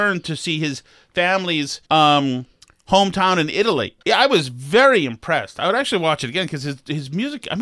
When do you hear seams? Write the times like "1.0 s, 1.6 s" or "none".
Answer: 1.8 s, 4.0 s

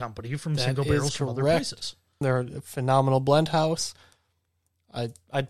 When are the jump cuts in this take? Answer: 2.2 s

